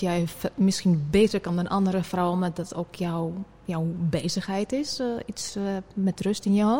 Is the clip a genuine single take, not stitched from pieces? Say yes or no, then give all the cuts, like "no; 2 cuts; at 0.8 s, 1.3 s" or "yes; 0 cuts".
yes; 0 cuts